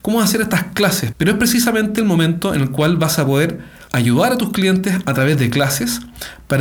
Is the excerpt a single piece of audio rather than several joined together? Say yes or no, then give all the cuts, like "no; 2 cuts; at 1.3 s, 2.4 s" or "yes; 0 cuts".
no; 2 cuts; at 1.1 s, 3.9 s